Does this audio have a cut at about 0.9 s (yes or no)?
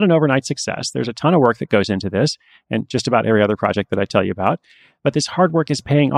no